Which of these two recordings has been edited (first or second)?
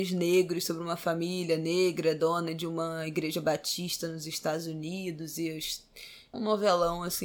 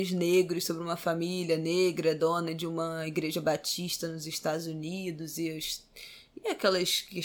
first